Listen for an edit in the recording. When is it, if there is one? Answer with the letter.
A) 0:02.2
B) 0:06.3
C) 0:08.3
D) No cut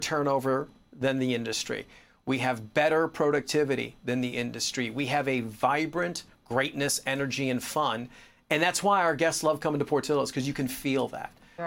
B